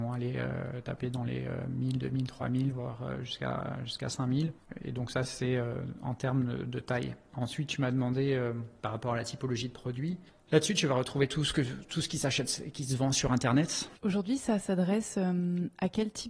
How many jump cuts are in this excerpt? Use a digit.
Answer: 1